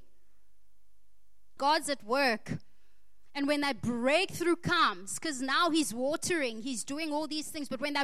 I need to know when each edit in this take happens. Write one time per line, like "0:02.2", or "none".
0:01.6